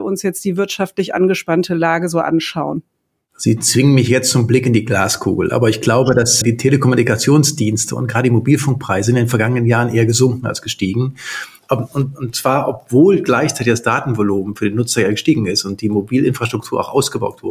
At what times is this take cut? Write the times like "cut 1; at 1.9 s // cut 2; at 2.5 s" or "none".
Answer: cut 1; at 6.4 s